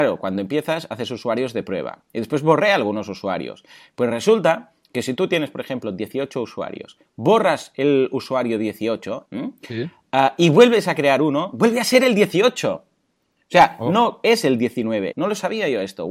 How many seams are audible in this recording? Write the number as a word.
two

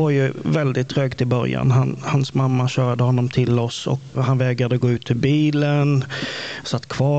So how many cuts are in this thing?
one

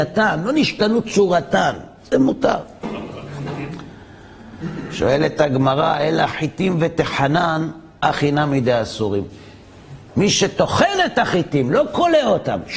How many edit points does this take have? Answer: zero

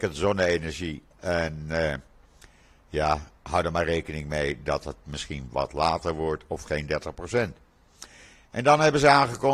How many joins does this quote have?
two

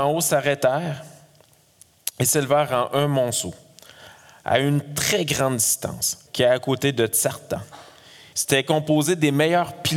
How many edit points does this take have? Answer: two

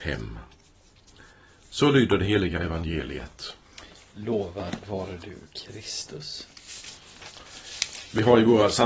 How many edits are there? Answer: zero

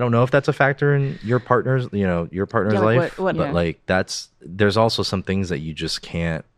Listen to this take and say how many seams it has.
one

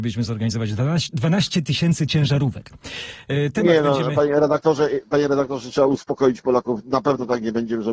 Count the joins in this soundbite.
zero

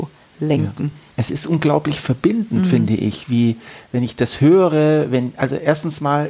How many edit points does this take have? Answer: zero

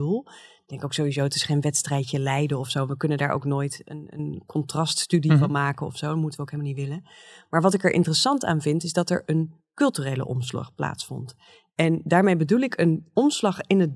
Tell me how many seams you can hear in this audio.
zero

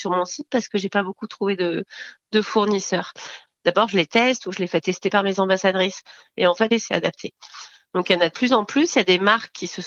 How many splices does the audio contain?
one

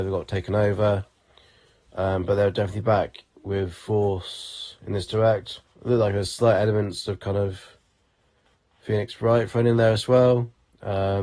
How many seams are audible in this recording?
one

